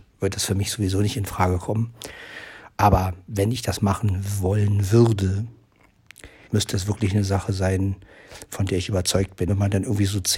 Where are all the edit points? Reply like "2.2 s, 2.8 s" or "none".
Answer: 6.5 s, 9.5 s